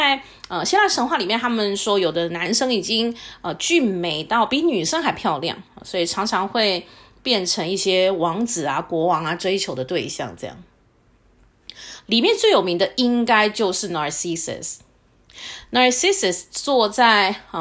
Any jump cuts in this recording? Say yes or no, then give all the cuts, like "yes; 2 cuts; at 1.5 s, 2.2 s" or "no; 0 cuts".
no; 0 cuts